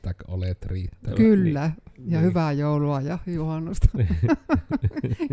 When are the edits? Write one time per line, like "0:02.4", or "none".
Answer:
none